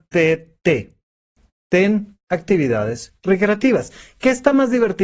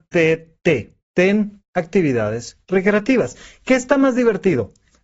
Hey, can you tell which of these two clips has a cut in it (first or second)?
second